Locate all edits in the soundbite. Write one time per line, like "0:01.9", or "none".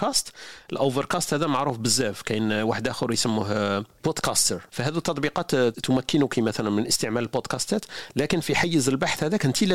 0:04.7